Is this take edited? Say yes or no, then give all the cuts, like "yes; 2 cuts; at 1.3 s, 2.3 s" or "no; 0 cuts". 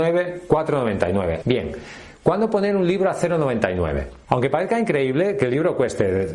yes; 2 cuts; at 1.4 s, 4.3 s